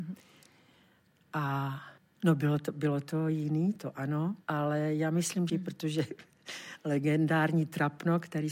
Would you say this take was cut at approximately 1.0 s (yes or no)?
no